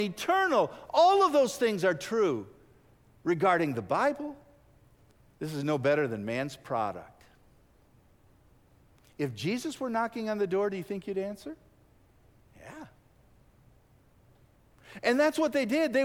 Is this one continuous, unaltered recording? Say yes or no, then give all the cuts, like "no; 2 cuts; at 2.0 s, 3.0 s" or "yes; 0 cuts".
no; 1 cut; at 5.3 s